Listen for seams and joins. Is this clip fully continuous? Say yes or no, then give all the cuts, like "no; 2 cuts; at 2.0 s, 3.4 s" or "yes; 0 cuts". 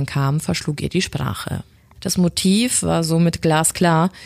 no; 1 cut; at 2.0 s